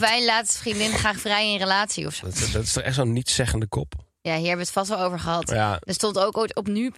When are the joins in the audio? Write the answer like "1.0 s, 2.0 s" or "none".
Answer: 2.2 s

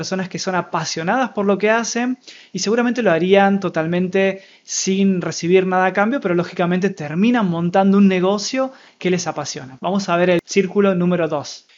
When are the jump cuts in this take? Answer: 9.8 s

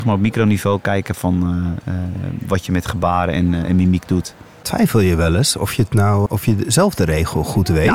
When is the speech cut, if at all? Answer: 6.3 s

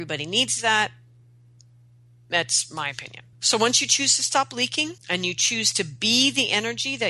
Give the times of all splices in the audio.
3.3 s, 5.0 s

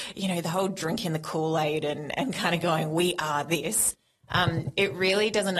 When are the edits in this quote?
none

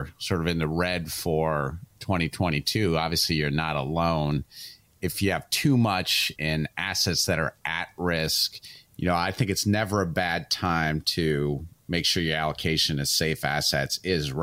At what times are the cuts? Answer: 6.4 s

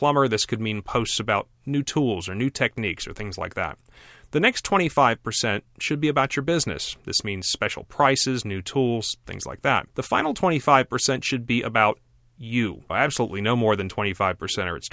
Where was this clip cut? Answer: 8.4 s, 9.9 s, 12.9 s

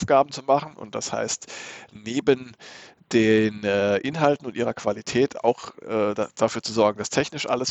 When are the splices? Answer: none

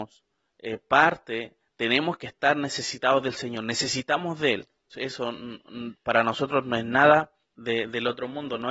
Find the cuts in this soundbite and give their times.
4.9 s, 7.4 s

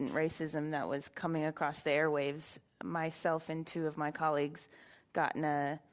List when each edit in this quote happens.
none

